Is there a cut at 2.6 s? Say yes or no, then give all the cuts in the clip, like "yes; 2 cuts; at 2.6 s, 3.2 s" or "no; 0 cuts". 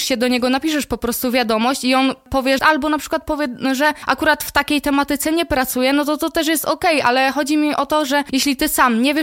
yes; 1 cut; at 2.6 s